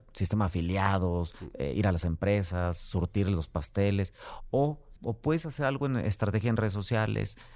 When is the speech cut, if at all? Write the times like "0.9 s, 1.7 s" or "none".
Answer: 5.0 s